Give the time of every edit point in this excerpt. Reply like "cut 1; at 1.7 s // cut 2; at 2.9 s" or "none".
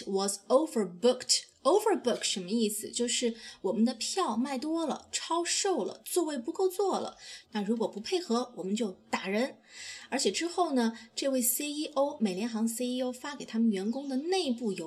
cut 1; at 7.4 s